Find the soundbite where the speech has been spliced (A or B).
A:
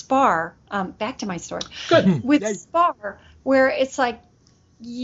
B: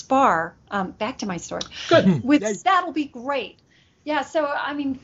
B